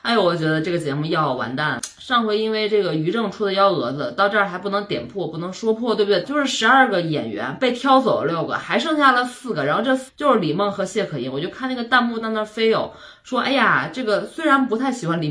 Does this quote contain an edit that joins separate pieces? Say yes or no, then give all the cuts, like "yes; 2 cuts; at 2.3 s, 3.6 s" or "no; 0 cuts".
yes; 3 cuts; at 1.8 s, 6.2 s, 10.1 s